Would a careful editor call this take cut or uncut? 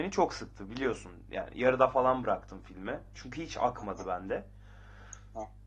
uncut